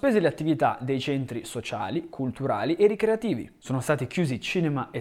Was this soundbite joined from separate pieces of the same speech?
yes; 1 cut; at 3.6 s

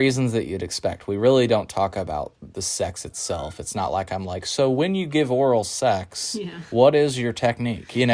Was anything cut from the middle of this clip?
no; 0 cuts

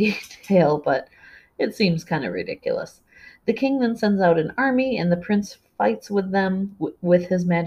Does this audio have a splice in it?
no; 0 cuts

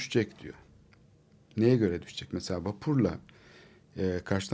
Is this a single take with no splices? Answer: yes; 0 cuts

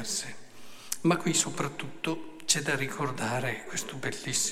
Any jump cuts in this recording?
no; 0 cuts

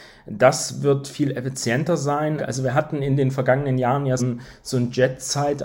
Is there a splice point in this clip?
yes; 2 cuts; at 2.4 s, 4.2 s

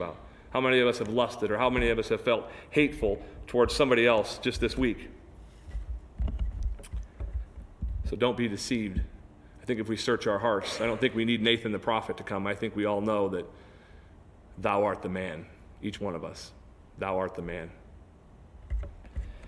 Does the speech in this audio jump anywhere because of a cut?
no; 0 cuts

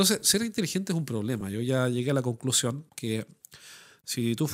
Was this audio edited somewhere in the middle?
no; 0 cuts

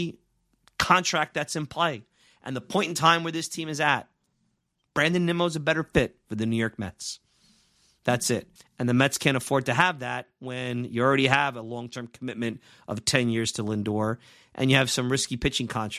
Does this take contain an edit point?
yes; 1 cut; at 8.6 s

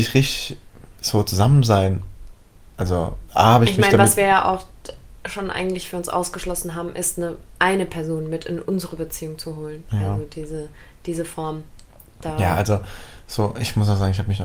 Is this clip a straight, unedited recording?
yes; 0 cuts

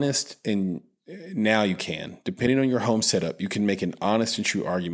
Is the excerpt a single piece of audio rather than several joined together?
yes; 0 cuts

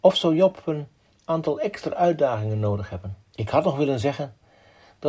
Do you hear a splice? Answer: yes; 1 cut; at 3.3 s

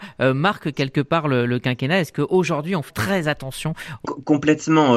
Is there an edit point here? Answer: yes; 2 cuts; at 2.9 s, 4.0 s

